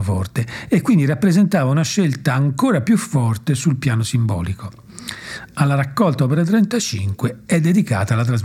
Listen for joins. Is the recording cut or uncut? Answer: uncut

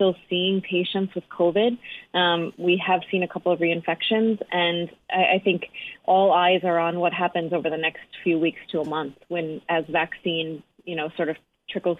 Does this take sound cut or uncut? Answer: uncut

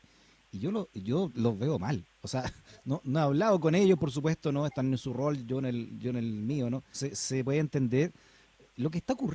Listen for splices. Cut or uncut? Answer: cut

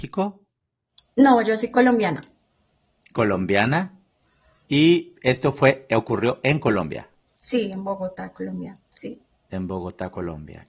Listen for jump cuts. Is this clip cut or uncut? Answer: uncut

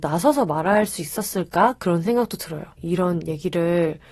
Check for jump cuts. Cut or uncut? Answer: cut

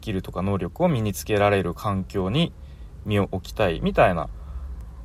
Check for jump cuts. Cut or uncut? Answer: uncut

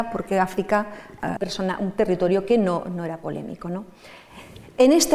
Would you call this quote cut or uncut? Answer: cut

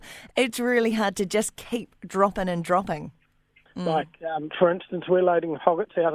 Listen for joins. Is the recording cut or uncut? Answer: cut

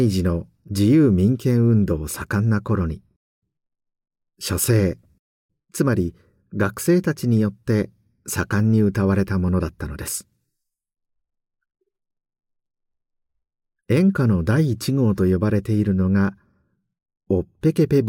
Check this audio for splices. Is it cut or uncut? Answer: uncut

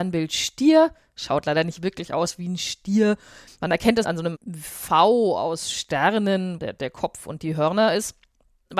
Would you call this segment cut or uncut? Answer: cut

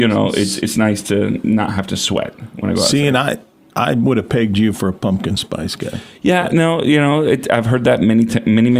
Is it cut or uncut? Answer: uncut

